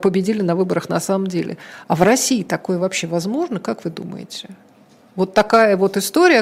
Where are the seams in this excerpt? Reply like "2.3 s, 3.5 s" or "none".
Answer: none